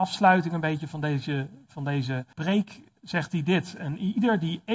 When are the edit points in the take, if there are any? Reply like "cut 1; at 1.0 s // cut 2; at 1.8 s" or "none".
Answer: cut 1; at 2.3 s